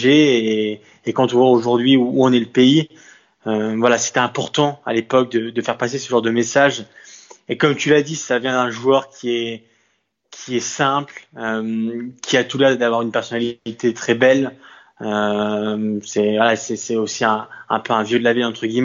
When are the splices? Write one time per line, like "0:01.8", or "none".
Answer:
none